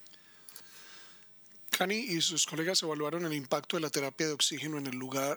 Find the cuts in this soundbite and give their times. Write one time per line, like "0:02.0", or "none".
none